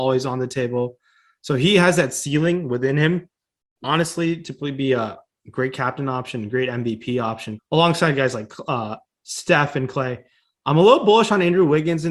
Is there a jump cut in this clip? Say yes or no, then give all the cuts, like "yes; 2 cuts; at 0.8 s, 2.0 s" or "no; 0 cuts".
yes; 1 cut; at 7.6 s